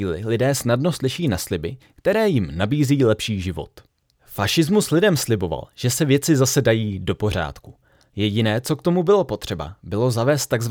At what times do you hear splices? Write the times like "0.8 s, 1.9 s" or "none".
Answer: none

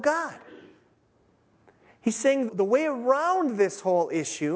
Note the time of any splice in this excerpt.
2.5 s

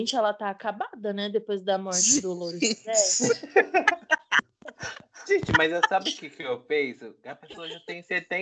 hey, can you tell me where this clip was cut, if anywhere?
none

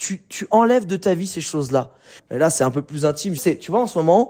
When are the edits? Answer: 2.2 s, 3.4 s

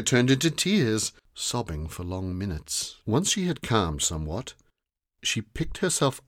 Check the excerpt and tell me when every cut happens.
1.2 s, 3.0 s

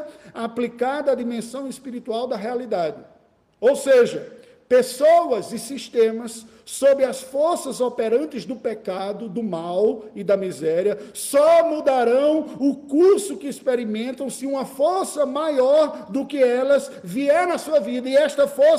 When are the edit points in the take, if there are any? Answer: none

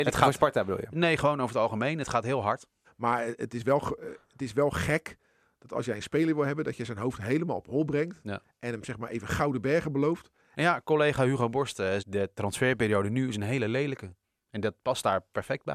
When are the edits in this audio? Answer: 2.8 s, 10.5 s, 12.0 s

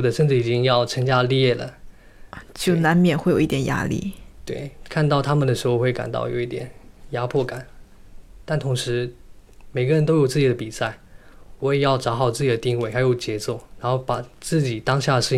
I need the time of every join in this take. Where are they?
none

